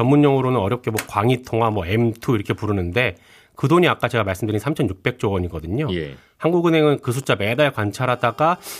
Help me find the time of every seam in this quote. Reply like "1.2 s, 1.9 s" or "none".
none